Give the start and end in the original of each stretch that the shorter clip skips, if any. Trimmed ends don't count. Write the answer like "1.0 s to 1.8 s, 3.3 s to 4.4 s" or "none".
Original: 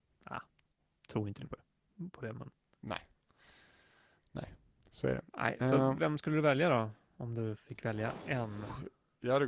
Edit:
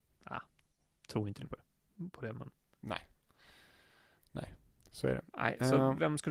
none